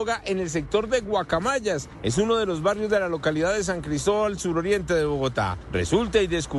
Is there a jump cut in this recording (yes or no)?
no